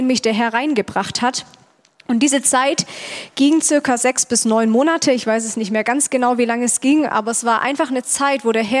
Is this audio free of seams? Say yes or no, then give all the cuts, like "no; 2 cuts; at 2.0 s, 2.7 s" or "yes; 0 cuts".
yes; 0 cuts